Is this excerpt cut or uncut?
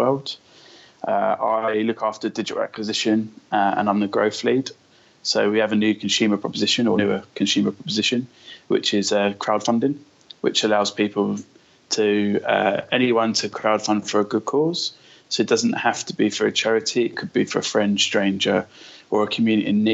uncut